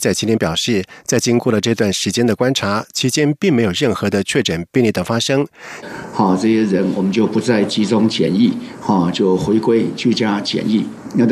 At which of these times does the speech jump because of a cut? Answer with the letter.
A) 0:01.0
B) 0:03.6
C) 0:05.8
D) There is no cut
C